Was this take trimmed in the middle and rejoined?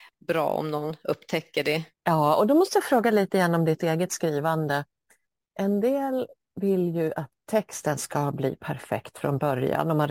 yes; 1 cut; at 1.9 s

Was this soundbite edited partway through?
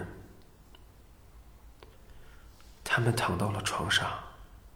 no; 0 cuts

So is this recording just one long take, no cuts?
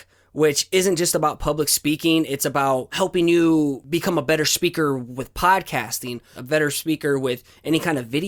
no; 1 cut; at 6.4 s

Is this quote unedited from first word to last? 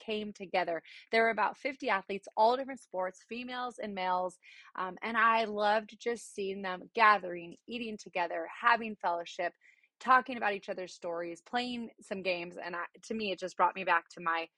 yes; 0 cuts

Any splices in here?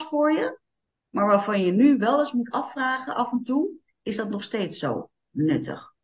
no; 0 cuts

